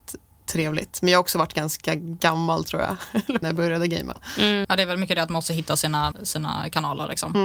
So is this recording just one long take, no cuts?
no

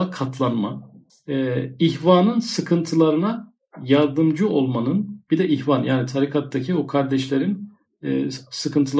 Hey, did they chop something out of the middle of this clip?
yes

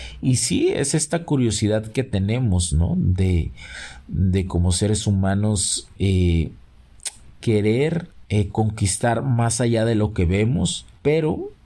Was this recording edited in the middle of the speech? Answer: no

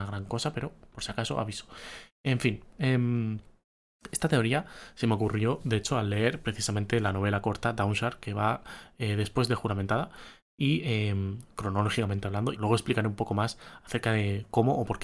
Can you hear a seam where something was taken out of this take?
yes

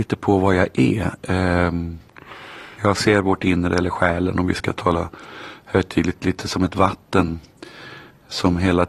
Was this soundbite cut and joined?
yes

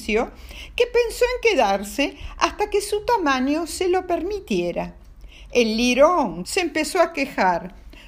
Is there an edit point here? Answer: yes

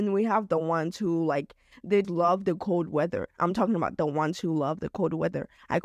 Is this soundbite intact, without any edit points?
no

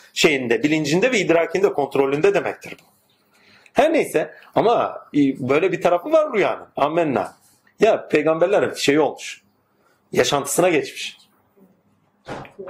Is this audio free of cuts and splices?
no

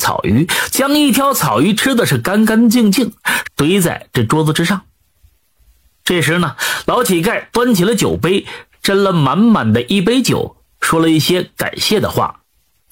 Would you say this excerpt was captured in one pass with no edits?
no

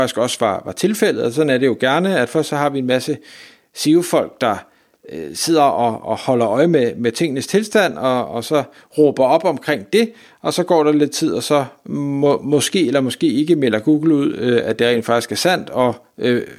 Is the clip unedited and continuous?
yes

